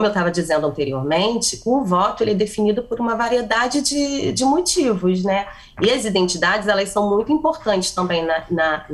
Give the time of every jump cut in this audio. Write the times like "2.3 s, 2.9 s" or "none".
none